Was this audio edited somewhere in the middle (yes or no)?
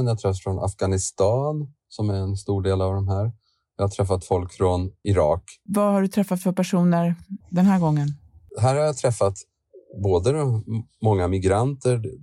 yes